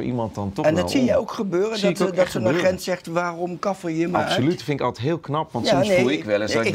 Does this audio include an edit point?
no; 0 cuts

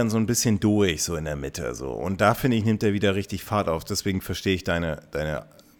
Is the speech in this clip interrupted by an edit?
no; 0 cuts

